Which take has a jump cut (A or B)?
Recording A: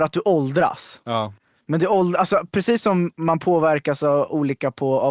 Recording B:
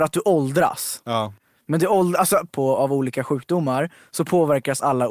B